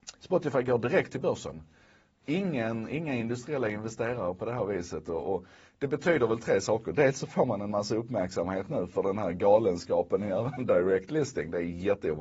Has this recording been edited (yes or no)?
no